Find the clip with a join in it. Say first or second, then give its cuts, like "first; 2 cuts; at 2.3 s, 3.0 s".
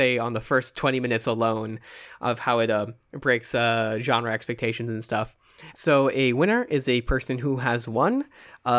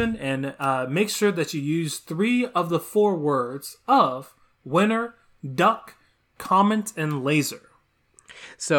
first; 1 cut; at 5.7 s